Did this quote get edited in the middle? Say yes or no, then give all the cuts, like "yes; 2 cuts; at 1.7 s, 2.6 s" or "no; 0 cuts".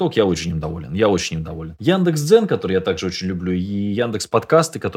no; 0 cuts